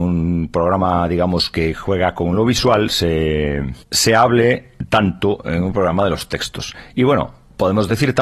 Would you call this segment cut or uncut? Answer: cut